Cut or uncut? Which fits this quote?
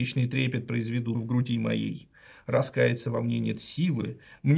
uncut